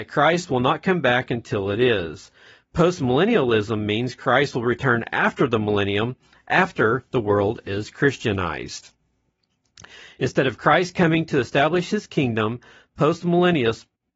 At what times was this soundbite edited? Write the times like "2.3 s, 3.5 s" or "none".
none